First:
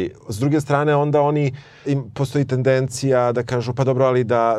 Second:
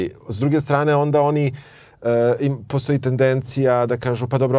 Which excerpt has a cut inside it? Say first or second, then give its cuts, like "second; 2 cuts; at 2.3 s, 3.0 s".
first; 1 cut; at 1.8 s